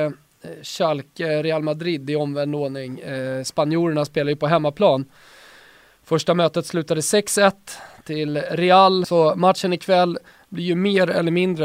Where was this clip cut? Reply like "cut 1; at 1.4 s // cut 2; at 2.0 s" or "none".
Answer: cut 1; at 9.0 s